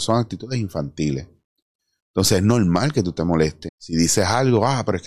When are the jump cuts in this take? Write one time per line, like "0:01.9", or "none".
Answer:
0:03.7